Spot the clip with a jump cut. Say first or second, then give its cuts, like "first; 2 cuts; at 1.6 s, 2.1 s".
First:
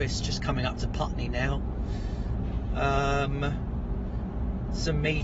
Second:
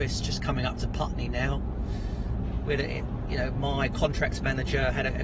second; 1 cut; at 2.7 s